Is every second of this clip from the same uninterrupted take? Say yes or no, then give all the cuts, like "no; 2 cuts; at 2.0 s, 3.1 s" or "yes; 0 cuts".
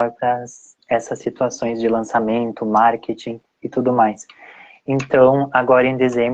yes; 0 cuts